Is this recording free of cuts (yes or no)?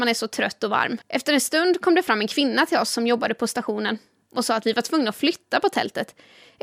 no